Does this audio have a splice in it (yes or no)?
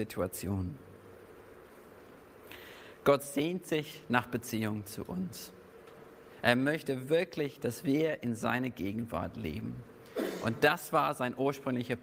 no